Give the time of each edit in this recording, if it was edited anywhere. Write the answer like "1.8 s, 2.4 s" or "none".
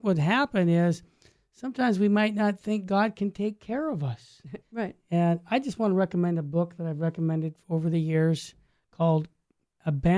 4.6 s